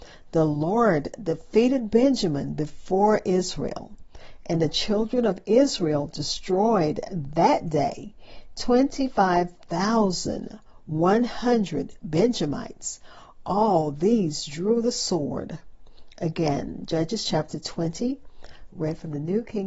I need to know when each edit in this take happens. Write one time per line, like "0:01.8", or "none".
0:18.7